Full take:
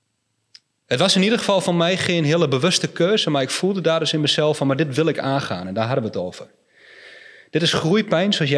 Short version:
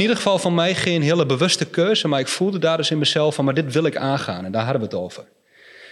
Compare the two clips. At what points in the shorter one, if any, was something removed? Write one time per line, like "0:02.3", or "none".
none